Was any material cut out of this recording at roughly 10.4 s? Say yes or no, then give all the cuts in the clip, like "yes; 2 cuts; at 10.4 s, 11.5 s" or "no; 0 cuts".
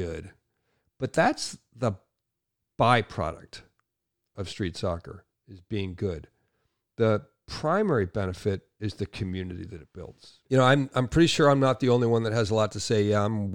yes; 1 cut; at 10.4 s